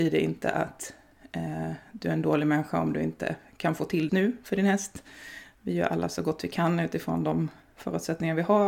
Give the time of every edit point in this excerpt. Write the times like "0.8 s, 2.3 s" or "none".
4.1 s

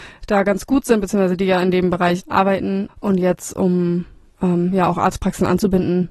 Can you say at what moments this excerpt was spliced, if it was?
2.9 s

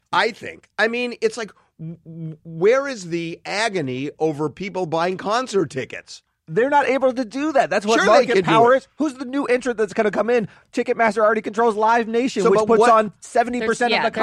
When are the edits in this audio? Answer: none

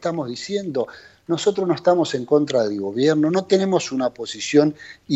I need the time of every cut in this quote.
none

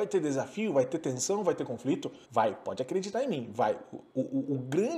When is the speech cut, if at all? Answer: 2.2 s

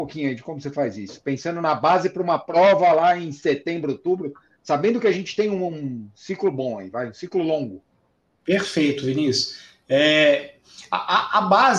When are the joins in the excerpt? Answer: none

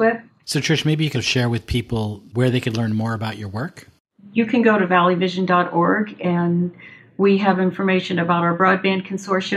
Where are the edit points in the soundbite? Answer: 1.1 s

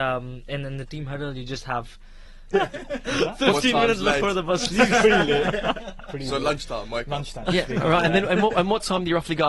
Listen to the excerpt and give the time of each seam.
2.5 s, 7.4 s

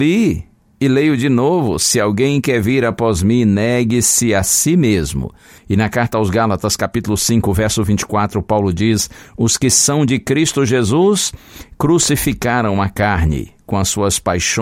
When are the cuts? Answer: 5.6 s

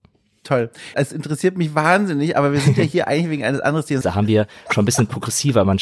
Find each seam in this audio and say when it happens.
0.9 s, 4.0 s

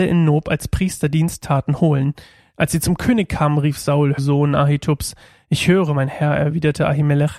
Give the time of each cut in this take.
4.2 s

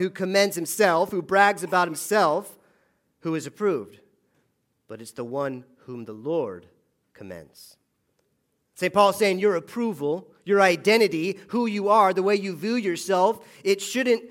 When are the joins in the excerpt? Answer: none

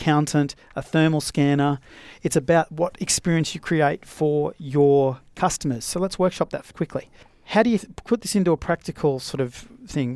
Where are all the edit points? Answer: 6.7 s, 7.8 s

